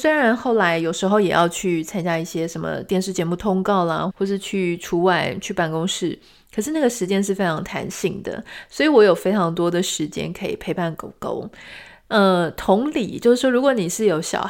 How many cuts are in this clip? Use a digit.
1